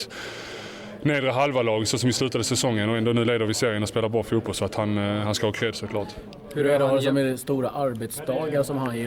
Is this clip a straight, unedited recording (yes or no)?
yes